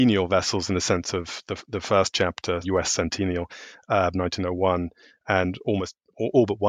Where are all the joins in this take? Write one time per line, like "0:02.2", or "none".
0:02.6
0:04.1